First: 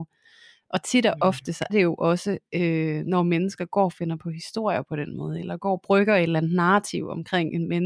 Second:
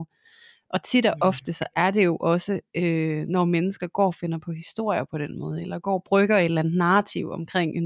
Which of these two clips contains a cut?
first; 1 cut; at 1.7 s

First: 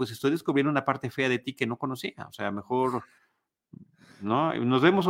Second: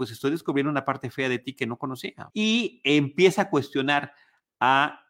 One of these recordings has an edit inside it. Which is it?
second; 1 cut; at 2.3 s

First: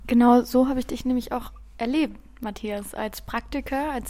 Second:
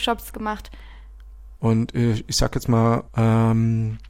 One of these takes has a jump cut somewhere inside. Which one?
second; 2 cuts; at 1.6 s, 3.1 s

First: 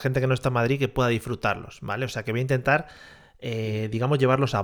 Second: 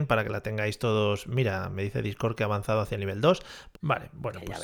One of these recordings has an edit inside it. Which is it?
second; 1 cut; at 3.7 s

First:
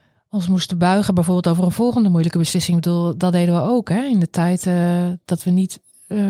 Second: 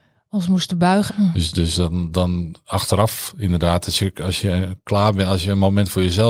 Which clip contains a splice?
second; 1 cut; at 1.1 s

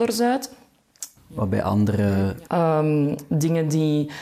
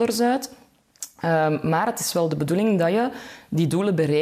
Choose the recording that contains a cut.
first; 2 cuts; at 1.2 s, 2.5 s

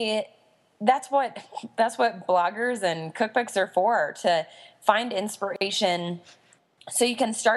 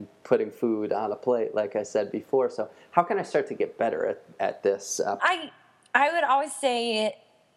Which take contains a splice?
second; 1 cut; at 5.2 s

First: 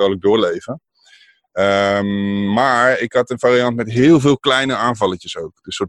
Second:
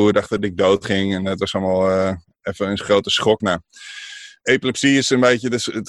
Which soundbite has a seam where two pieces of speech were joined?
second; 1 cut; at 3.4 s

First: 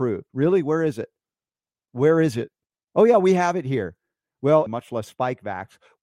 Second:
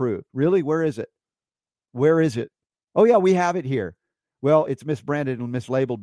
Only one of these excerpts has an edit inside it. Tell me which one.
first; 1 cut; at 4.7 s

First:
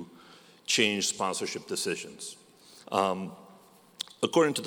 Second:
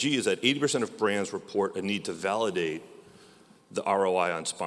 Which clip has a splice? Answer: first; 1 cut; at 2.8 s

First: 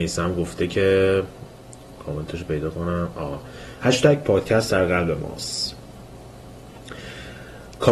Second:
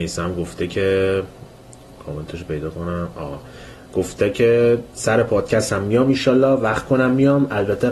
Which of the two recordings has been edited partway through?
first; 1 cut; at 3.8 s

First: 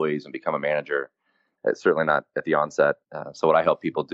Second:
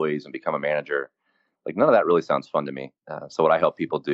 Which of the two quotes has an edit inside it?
first; 2 cuts; at 1.6 s, 3.0 s

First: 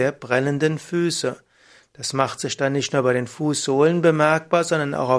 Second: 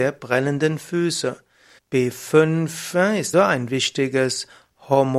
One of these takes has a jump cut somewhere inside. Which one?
second; 2 cuts; at 1.8 s, 3.3 s

